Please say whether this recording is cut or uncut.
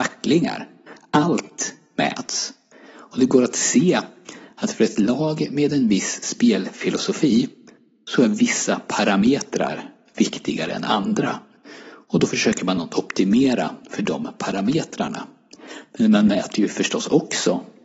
uncut